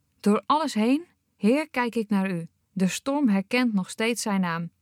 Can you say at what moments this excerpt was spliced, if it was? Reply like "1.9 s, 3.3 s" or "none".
2.6 s